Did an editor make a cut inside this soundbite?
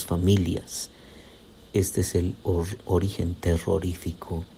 no; 0 cuts

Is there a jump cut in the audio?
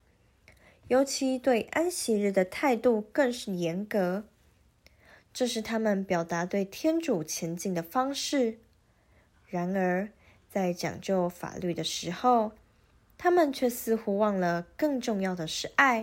no; 0 cuts

